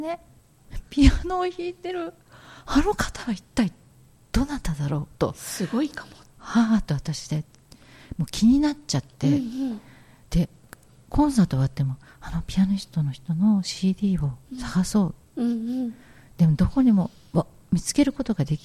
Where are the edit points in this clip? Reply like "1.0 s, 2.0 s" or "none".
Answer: none

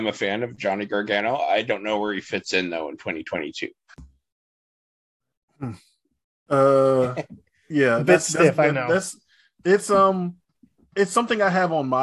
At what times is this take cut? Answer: none

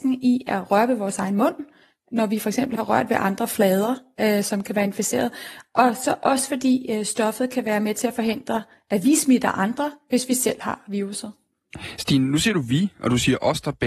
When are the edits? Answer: none

